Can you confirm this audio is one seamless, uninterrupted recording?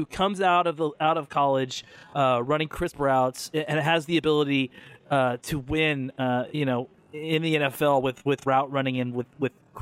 yes; 0 cuts

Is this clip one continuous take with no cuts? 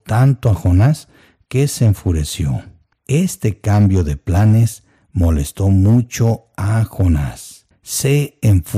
no; 2 cuts; at 2.9 s, 7.7 s

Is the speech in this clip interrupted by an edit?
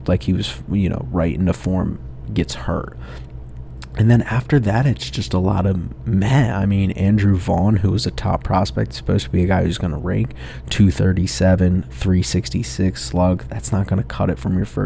no; 0 cuts

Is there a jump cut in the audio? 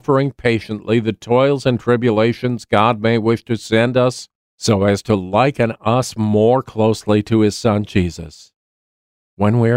no; 0 cuts

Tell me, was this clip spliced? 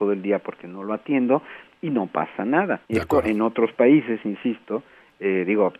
yes; 1 cut; at 2.8 s

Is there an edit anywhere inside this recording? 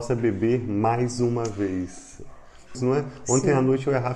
yes; 1 cut; at 2.7 s

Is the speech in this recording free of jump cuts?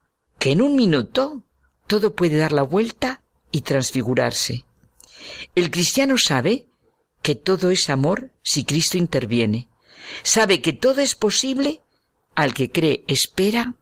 yes; 0 cuts

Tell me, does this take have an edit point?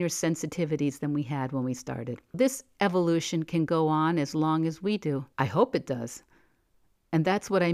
yes; 2 cuts; at 2.3 s, 5.3 s

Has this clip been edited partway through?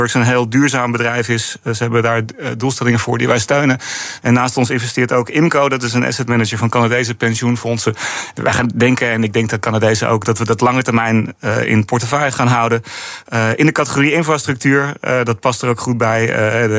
yes; 1 cut; at 4.2 s

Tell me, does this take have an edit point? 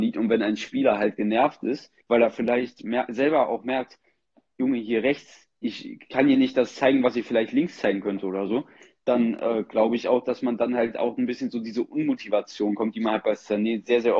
yes; 1 cut; at 2.0 s

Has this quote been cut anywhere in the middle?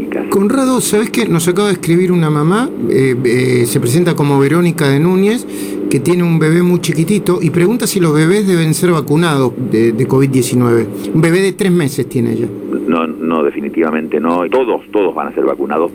yes; 2 cuts; at 9.6 s, 14.5 s

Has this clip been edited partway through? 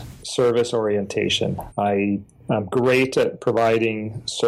yes; 1 cut; at 1.7 s

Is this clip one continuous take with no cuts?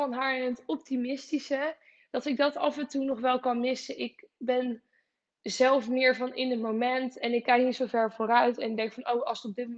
yes; 0 cuts

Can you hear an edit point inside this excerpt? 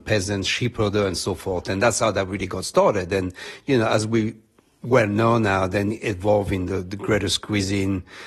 no; 0 cuts

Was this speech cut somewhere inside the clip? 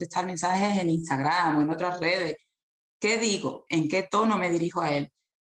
yes; 1 cut; at 3.7 s

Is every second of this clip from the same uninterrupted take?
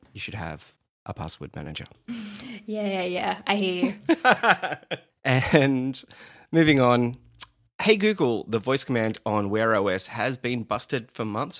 yes; 0 cuts

